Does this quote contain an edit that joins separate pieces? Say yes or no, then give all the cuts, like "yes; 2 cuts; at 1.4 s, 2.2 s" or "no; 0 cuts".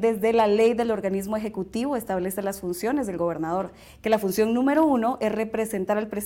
no; 0 cuts